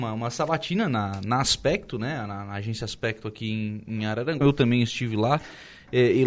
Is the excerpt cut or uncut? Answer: cut